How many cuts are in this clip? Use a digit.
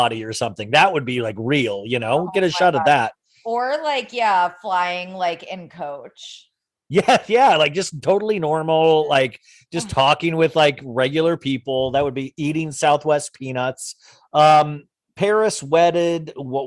1